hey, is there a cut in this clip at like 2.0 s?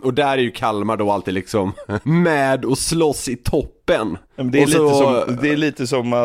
yes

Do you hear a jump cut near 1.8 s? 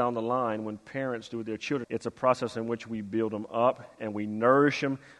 yes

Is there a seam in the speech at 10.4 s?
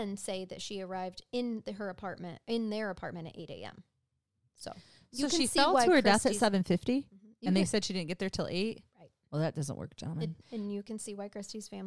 yes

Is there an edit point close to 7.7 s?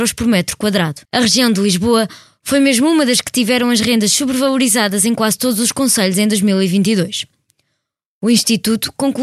no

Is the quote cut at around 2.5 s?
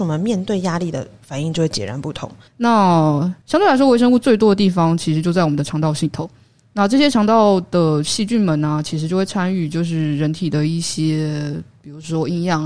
yes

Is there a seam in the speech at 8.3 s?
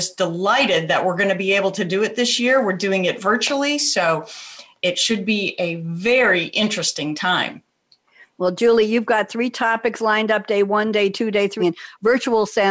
no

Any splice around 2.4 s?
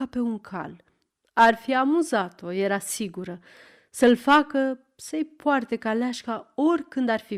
no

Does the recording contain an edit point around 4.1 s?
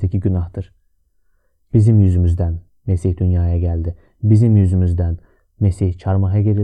no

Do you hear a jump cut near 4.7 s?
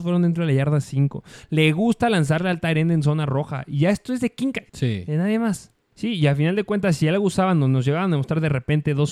yes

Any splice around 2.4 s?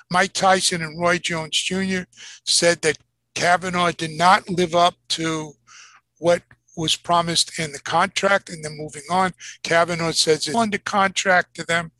no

